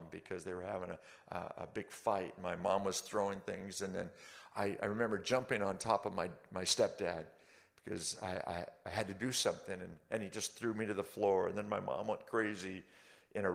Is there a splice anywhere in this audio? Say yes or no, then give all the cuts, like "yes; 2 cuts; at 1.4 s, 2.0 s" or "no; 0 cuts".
no; 0 cuts